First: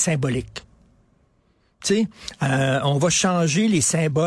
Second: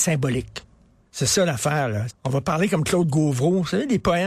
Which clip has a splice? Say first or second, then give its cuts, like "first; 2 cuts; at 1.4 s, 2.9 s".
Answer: second; 2 cuts; at 1.1 s, 2.1 s